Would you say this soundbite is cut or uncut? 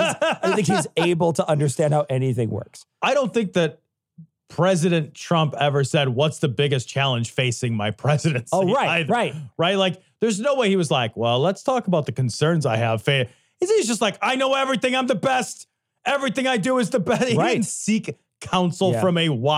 uncut